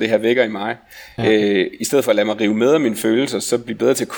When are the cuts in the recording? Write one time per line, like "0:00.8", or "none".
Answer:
none